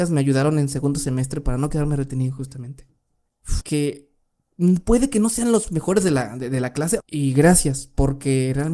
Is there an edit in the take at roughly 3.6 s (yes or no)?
yes